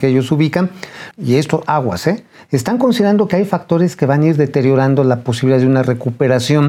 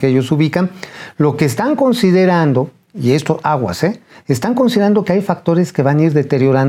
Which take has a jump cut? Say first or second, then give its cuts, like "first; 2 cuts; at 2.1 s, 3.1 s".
first; 1 cut; at 1.1 s